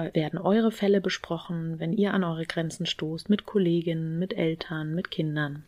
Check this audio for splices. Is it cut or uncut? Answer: uncut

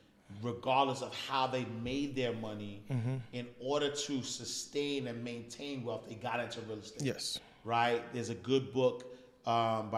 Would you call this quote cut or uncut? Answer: uncut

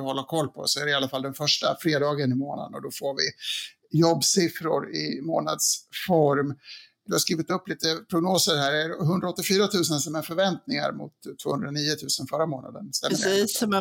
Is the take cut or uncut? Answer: uncut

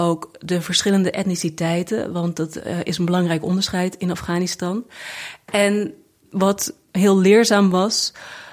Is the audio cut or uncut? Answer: uncut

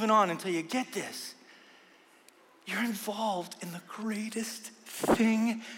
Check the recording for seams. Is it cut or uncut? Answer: uncut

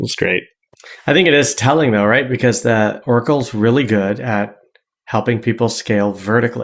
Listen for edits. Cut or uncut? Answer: uncut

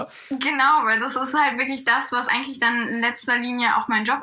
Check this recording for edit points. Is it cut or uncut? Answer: uncut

